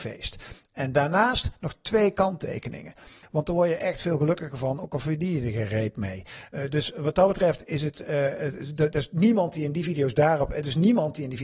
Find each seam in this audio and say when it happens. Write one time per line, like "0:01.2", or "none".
0:03.2